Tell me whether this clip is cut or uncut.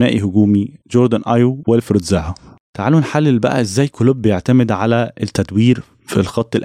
uncut